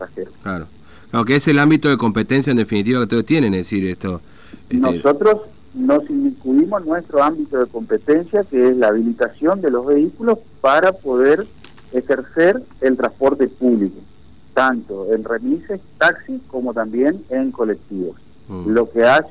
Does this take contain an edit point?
no; 0 cuts

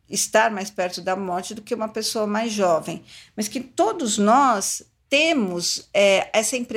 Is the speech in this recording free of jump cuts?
yes; 0 cuts

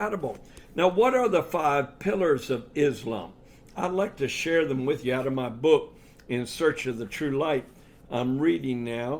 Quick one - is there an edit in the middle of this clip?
no; 0 cuts

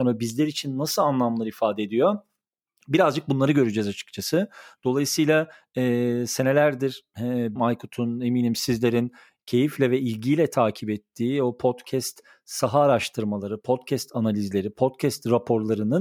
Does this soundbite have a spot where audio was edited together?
yes; 1 cut; at 7.6 s

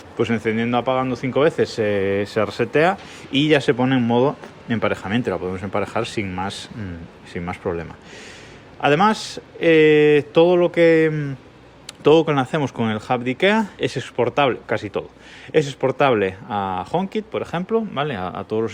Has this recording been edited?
yes; 1 cut; at 13.8 s

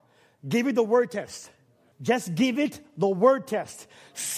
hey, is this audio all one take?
no; 1 cut; at 1.9 s

